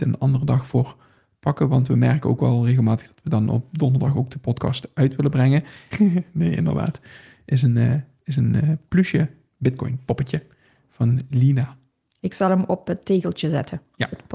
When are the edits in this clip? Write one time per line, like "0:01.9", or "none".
0:05.9